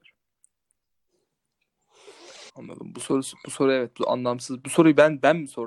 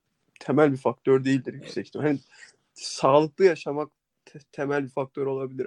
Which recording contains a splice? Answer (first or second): first